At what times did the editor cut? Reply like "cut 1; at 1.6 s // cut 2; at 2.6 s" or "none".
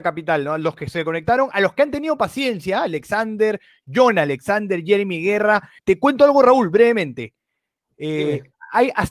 cut 1; at 5.8 s